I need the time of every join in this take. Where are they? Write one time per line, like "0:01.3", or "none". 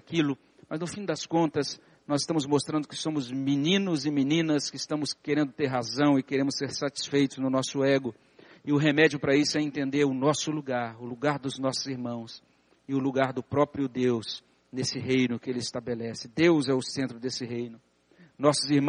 none

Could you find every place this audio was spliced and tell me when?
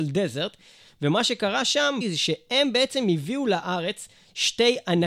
0:02.0

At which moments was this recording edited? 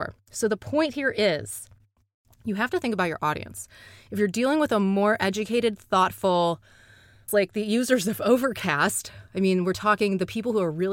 0:07.3

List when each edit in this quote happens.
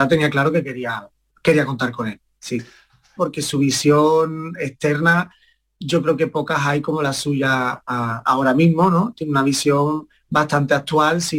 0:03.2

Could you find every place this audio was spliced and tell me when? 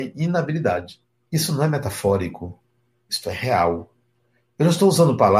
0:01.3

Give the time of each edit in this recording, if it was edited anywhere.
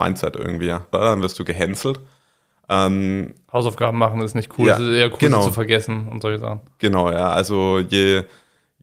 0:00.9

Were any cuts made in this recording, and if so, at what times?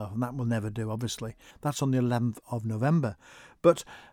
0:01.5

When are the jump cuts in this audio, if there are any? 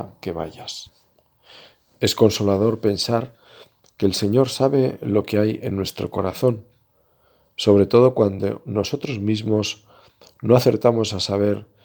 none

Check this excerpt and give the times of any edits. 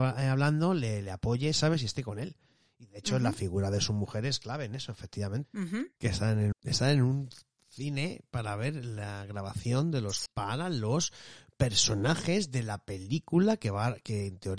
0:05.4
0:06.5
0:10.3

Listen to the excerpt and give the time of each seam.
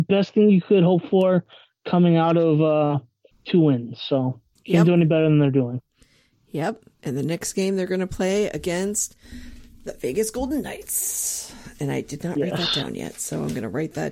0:03.3

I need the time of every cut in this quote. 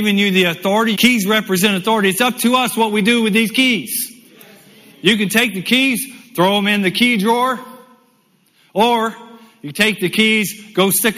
0:00.9

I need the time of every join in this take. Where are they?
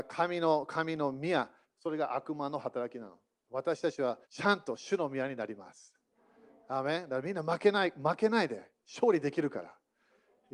0:01.6
0:04.2

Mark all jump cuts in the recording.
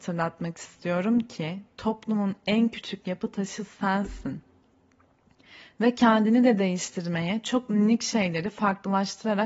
none

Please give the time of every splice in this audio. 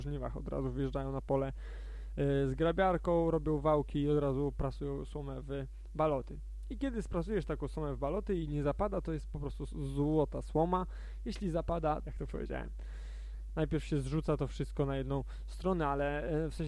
0:12.0
0:13.5

